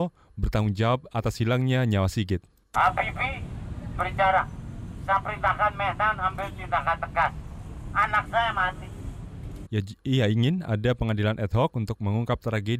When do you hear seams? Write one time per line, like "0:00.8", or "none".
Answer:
0:09.7